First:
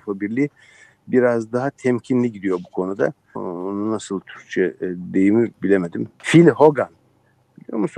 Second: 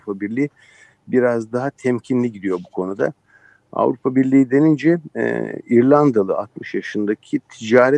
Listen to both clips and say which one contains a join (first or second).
first